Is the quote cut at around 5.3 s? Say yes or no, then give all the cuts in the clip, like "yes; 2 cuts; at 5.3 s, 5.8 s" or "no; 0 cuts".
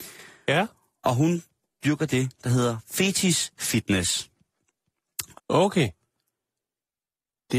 yes; 1 cut; at 5.3 s